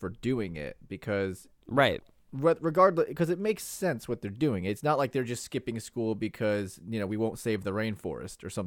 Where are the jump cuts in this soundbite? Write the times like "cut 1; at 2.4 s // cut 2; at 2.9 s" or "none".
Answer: none